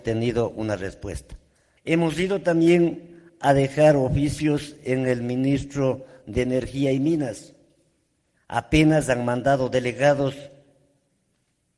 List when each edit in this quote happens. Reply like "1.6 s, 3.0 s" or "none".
1.8 s, 8.4 s